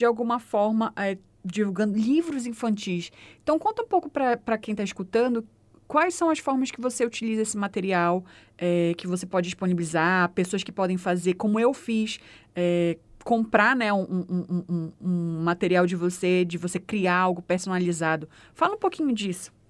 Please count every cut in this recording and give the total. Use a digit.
0